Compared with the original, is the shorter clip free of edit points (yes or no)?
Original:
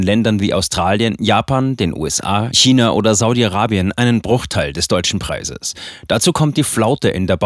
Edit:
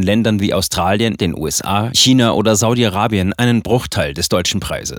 no